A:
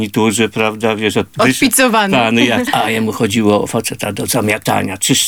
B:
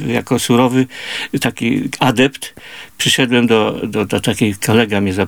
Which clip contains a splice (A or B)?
A